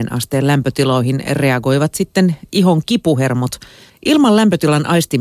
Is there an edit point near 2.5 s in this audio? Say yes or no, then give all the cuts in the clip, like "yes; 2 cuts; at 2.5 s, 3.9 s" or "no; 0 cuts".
no; 1 cut; at 3.9 s